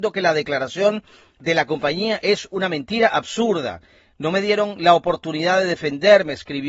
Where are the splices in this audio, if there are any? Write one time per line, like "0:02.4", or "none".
none